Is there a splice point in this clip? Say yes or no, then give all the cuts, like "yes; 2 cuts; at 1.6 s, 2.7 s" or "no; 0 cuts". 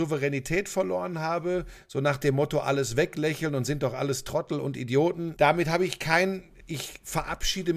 yes; 2 cuts; at 5.4 s, 6.6 s